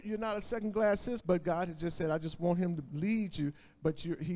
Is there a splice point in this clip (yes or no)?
yes